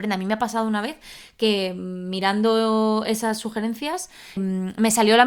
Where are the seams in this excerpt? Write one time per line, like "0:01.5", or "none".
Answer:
0:04.4